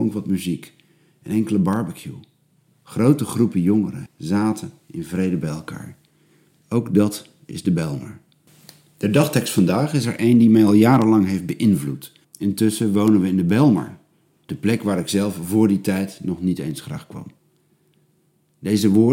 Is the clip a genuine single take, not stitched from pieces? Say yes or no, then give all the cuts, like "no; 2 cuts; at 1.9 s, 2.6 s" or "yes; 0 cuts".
no; 3 cuts; at 4.1 s, 12.2 s, 14.5 s